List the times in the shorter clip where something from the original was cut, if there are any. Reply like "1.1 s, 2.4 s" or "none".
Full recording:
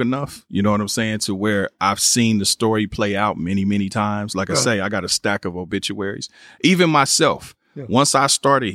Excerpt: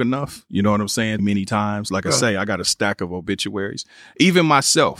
1.2 s